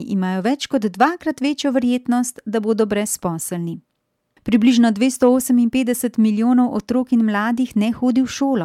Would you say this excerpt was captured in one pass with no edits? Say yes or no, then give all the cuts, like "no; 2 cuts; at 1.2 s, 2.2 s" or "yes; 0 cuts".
no; 1 cut; at 4.4 s